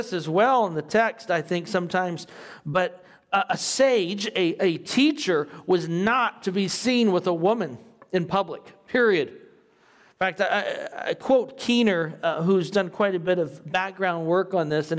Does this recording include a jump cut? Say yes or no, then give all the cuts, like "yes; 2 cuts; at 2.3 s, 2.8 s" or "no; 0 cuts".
no; 0 cuts